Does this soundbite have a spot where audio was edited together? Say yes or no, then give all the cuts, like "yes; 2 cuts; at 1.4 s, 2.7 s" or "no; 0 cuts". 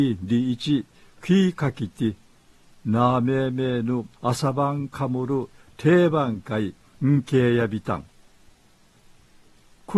yes; 1 cut; at 4.1 s